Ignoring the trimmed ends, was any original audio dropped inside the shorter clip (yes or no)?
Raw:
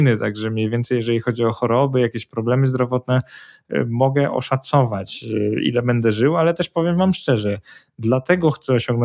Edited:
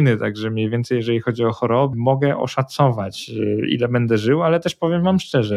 yes